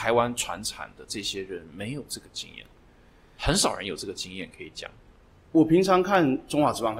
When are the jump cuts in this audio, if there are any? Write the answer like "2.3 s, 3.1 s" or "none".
5.3 s